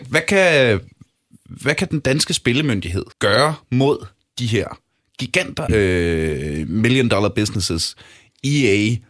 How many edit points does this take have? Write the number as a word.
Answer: two